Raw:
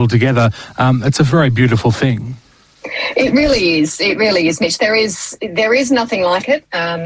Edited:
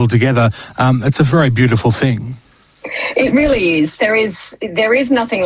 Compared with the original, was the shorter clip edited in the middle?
yes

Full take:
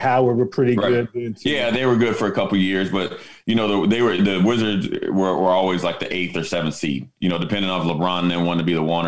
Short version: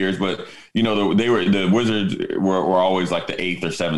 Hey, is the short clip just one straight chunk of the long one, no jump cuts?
yes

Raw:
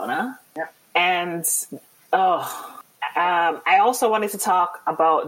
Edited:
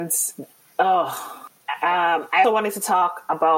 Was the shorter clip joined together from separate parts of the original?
yes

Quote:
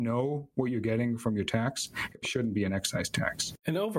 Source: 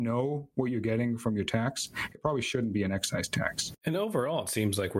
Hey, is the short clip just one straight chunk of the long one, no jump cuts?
no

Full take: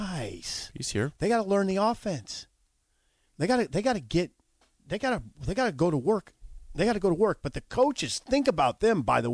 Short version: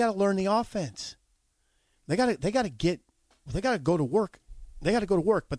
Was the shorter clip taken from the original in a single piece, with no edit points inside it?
no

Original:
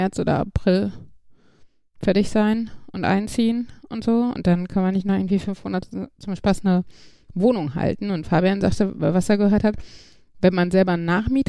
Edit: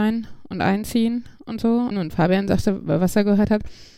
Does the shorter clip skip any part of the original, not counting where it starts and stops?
yes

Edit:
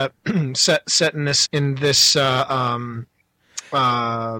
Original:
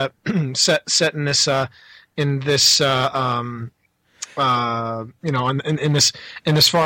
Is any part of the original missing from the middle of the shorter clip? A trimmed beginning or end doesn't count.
yes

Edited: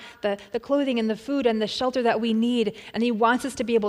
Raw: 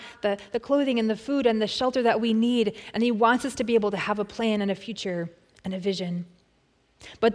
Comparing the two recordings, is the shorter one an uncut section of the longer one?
yes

